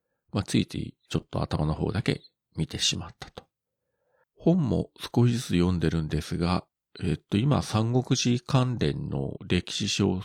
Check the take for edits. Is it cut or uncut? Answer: cut